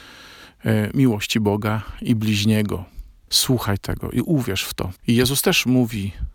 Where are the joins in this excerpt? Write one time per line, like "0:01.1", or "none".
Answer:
0:03.3
0:05.0

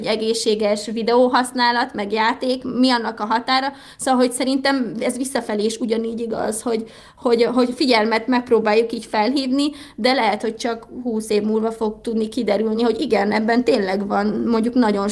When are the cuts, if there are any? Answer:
none

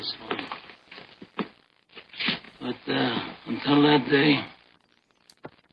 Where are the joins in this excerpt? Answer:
none

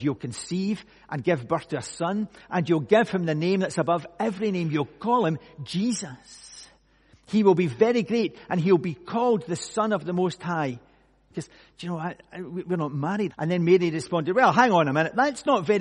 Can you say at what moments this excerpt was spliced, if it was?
0:11.3
0:13.3

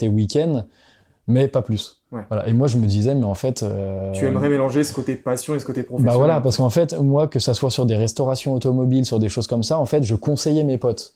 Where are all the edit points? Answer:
none

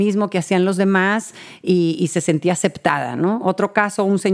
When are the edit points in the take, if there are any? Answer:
none

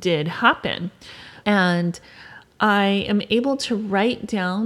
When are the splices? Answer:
0:01.4

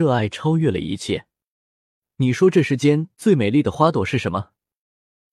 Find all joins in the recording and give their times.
none

